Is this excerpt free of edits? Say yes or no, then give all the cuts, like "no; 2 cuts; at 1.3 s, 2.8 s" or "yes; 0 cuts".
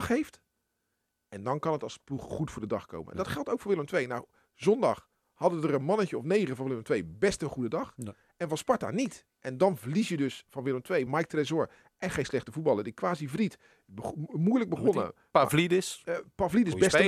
no; 1 cut; at 11.1 s